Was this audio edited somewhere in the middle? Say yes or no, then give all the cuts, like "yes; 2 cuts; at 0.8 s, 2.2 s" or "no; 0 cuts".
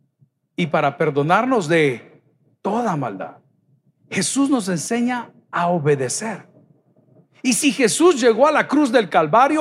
no; 0 cuts